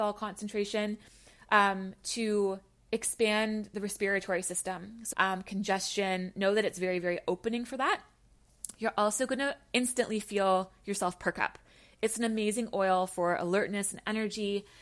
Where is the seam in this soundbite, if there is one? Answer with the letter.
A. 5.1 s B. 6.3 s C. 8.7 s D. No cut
A